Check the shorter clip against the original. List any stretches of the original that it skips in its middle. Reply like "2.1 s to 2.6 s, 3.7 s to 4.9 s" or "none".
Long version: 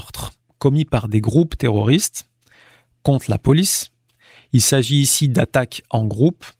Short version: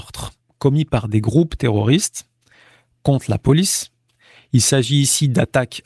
none